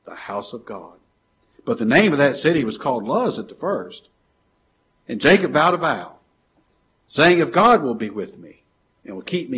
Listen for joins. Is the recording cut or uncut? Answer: uncut